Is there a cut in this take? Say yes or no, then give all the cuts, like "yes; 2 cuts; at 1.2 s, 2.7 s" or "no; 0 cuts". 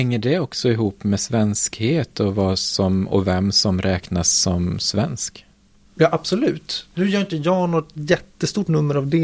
no; 0 cuts